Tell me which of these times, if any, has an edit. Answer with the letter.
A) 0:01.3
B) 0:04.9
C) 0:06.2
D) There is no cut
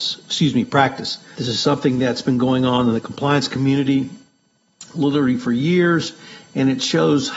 A